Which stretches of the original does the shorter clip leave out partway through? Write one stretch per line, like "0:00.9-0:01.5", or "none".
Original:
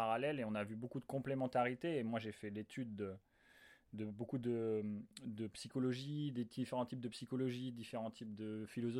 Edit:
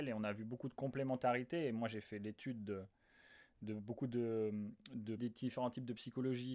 0:05.5-0:06.3